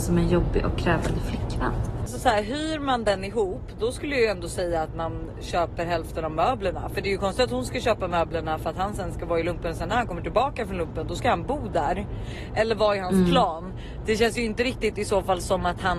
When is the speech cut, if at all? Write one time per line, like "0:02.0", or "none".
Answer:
none